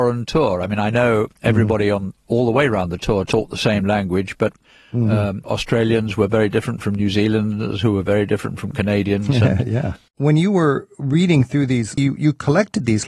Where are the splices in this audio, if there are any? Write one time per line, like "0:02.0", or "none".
0:10.1
0:12.0

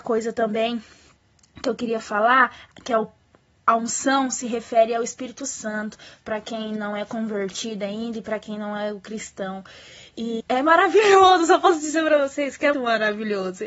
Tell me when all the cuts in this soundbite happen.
0:10.4
0:12.7

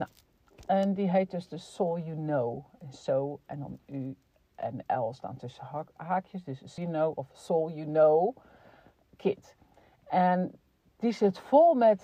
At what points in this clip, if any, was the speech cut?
0:06.8

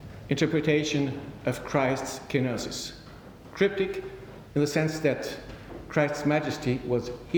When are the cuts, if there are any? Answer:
0:04.5

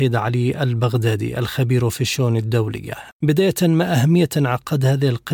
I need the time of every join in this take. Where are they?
0:03.1

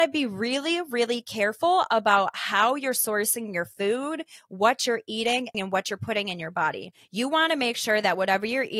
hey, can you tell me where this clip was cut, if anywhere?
0:05.5

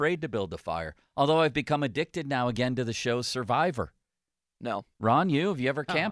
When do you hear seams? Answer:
0:04.5

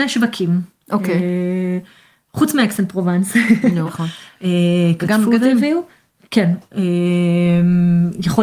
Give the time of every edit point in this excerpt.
0:03.9

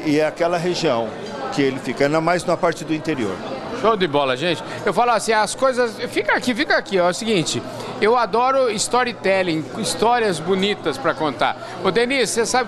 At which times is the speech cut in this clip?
none

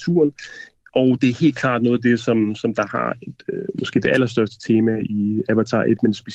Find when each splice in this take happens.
none

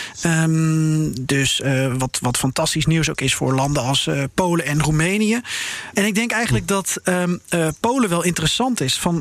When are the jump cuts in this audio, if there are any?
0:05.9

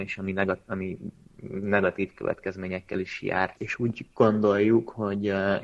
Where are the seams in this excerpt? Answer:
0:03.6

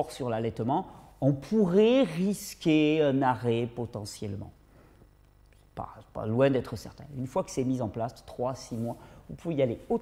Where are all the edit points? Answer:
none

